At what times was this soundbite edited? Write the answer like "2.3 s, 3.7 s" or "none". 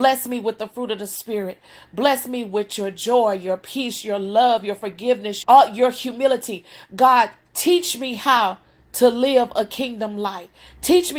5.4 s